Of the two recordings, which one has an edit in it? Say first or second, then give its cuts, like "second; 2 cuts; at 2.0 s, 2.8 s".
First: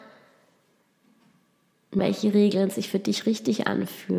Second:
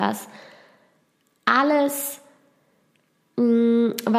first; 1 cut; at 2.0 s